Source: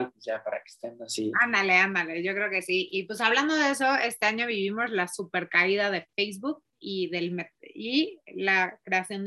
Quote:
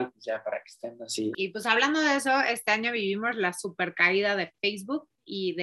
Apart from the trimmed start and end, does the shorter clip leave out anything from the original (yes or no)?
yes